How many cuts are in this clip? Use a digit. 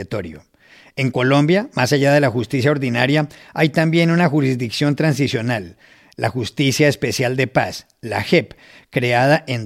0